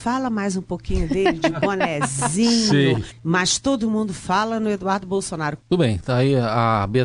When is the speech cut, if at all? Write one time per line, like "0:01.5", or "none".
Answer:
0:03.1
0:05.6